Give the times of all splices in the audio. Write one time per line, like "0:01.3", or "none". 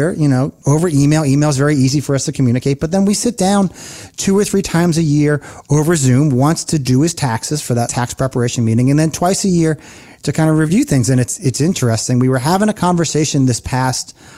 none